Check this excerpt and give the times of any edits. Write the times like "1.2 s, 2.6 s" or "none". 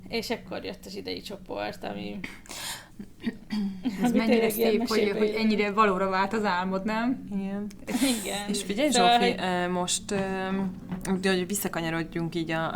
none